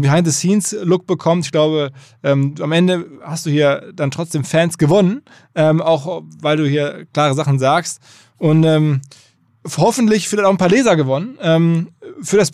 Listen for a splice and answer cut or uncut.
uncut